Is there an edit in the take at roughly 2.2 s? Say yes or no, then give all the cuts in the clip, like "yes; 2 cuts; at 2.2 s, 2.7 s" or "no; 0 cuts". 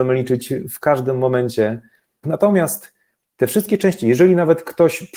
yes; 1 cut; at 2.2 s